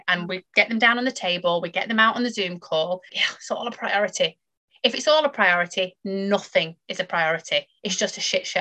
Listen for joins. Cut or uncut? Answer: cut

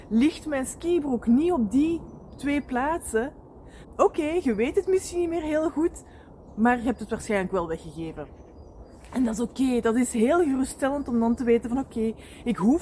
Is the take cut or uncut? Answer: cut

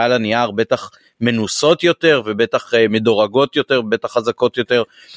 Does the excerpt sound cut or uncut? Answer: uncut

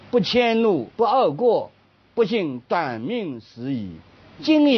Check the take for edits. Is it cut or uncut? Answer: cut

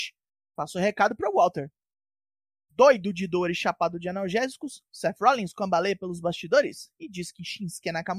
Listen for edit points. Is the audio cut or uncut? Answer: uncut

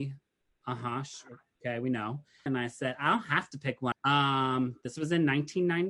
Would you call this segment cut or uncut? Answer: cut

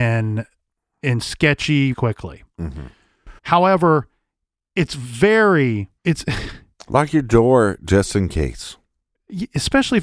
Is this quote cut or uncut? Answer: cut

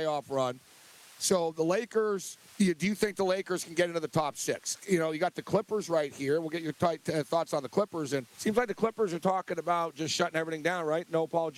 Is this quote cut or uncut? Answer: cut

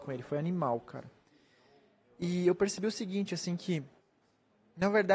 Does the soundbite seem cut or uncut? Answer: uncut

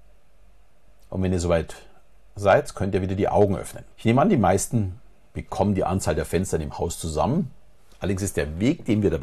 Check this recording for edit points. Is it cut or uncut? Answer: cut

